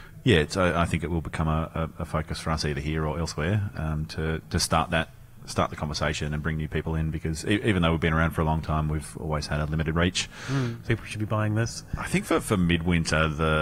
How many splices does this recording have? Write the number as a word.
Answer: one